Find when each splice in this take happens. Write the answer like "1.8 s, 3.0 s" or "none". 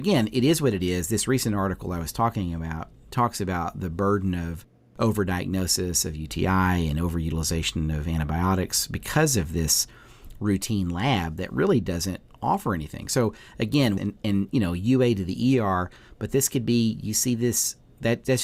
14.0 s